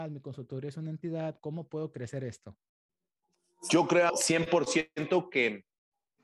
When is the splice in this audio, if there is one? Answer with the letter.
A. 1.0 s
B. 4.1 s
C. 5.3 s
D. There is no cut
B